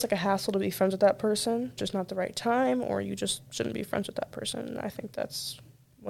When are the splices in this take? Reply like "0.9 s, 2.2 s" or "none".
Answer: 1.8 s

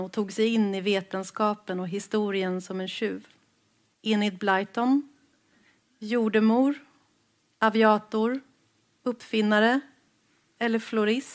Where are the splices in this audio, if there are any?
3.9 s

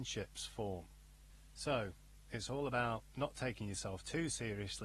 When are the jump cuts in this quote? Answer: none

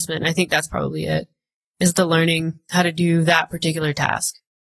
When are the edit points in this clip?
none

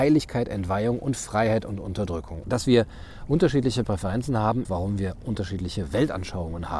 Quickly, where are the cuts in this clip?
2.4 s, 4.6 s

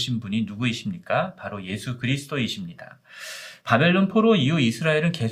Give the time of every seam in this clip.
3.6 s

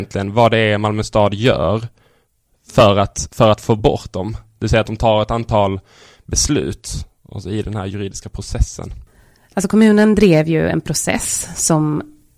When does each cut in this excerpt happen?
none

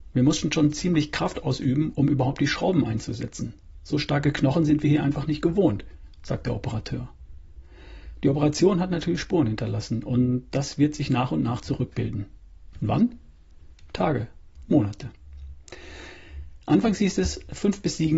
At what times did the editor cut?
12.7 s, 14.7 s

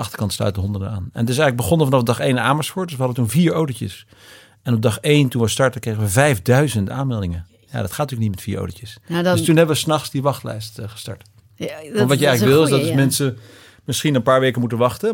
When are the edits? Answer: none

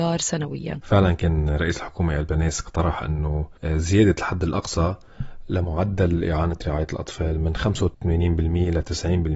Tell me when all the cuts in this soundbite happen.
none

